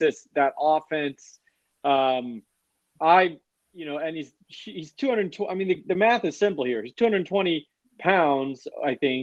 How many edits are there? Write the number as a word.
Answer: zero